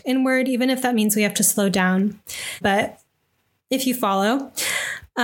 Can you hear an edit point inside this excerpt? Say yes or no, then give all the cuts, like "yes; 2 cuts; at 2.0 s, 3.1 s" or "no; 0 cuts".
yes; 1 cut; at 2.6 s